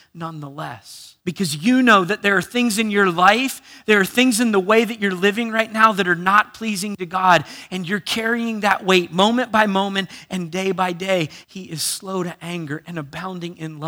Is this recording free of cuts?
no; 2 cuts; at 1.2 s, 11.4 s

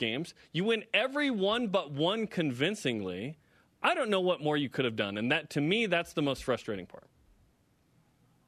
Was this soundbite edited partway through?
no; 0 cuts

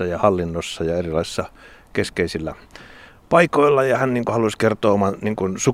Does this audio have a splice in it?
no; 0 cuts

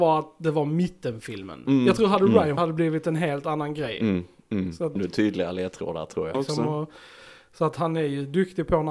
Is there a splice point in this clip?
yes; 3 cuts; at 2.6 s, 5.0 s, 6.3 s

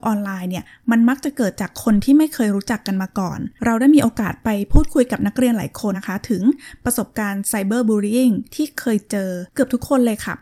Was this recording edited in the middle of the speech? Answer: yes; 1 cut; at 5.9 s

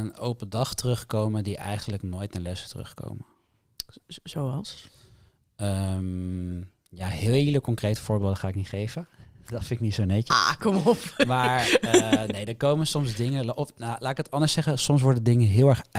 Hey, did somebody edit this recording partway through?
no; 0 cuts

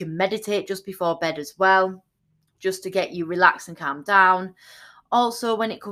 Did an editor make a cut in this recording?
no; 0 cuts

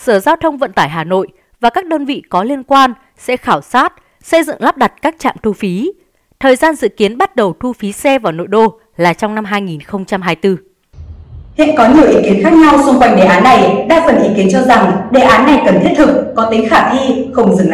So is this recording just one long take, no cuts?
yes; 0 cuts

